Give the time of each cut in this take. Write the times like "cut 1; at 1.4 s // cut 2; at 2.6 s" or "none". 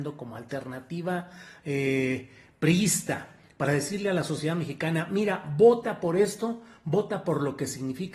none